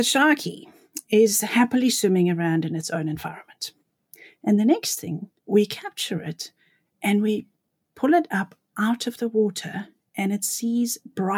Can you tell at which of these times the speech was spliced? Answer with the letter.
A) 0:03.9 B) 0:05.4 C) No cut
B